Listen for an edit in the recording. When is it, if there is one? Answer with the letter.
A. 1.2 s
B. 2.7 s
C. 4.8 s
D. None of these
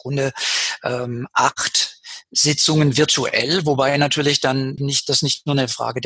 C